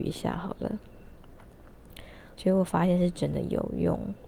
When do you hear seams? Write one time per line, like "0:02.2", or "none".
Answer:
0:02.3